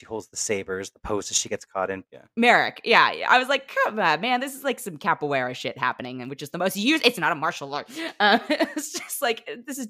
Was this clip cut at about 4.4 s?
no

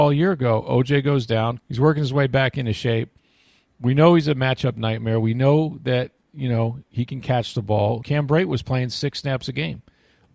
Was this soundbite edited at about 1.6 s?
yes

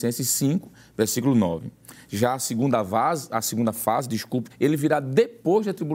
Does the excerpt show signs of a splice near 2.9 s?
no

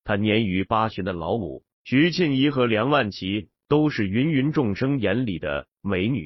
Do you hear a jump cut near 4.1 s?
no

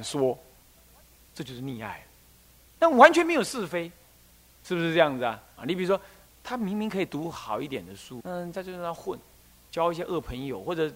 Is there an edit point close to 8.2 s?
yes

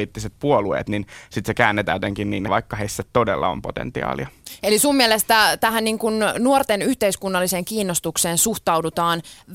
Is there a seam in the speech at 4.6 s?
no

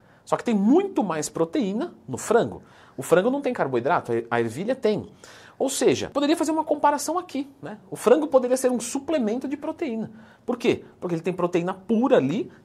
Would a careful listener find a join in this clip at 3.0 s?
no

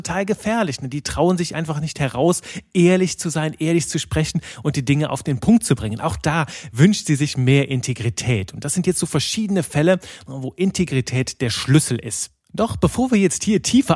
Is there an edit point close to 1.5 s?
no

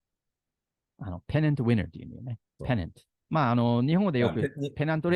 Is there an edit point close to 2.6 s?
yes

